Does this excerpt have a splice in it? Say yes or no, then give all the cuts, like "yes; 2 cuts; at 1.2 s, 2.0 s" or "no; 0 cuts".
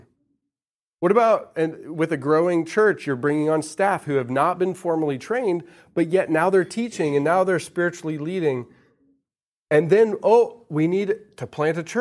no; 0 cuts